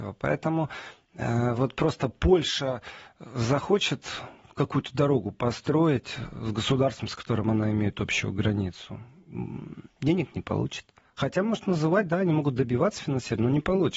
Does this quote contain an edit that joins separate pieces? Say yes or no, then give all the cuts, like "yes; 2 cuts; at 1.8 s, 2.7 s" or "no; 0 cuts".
no; 0 cuts